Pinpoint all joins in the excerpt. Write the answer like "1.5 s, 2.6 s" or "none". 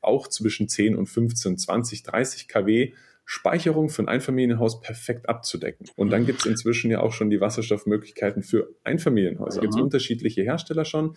5.9 s, 9.6 s